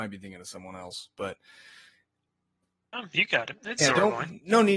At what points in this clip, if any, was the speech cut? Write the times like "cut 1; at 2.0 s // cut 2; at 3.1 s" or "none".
none

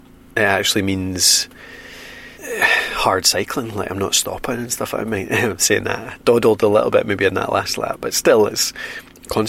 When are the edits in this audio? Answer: cut 1; at 2.3 s

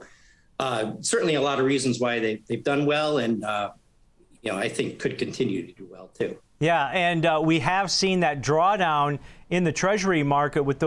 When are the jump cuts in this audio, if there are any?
none

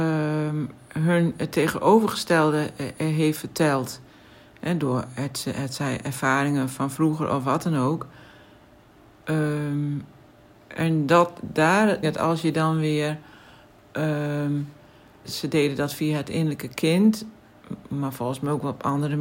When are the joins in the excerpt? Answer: cut 1; at 12.0 s // cut 2; at 15.2 s

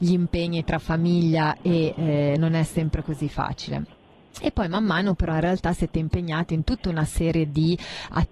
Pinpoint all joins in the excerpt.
cut 1; at 2.4 s

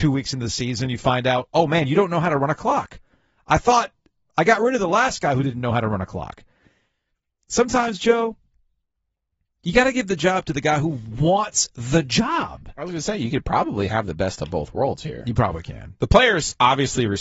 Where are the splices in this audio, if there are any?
none

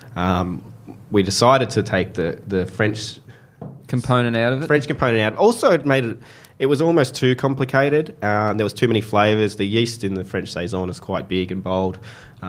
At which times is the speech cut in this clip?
none

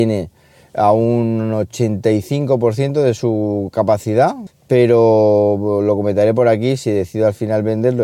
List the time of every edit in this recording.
cut 1; at 4.5 s

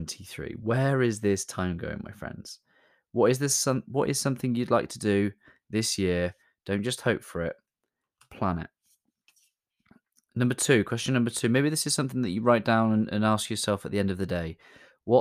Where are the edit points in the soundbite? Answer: none

